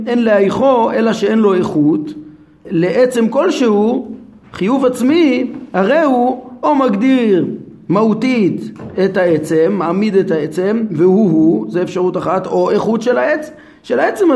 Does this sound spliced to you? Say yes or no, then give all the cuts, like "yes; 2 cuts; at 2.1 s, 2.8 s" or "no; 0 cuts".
yes; 1 cut; at 2.6 s